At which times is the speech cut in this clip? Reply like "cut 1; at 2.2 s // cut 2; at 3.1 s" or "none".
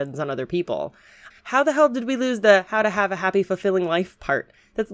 cut 1; at 1.3 s